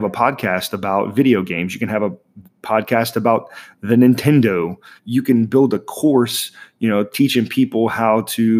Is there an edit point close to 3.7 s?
no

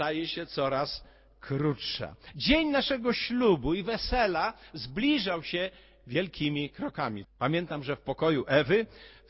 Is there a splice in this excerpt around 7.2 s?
yes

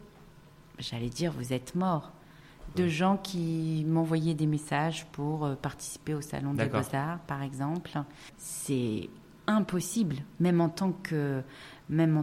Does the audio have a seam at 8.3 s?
yes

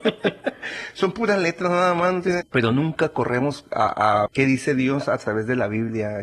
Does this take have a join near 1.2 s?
no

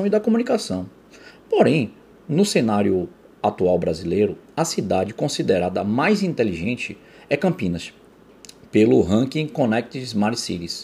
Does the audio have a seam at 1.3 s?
yes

